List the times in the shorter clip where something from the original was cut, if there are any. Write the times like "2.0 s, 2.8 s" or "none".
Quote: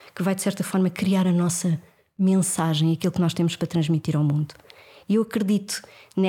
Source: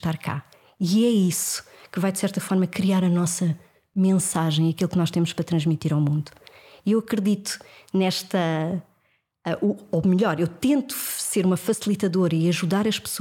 none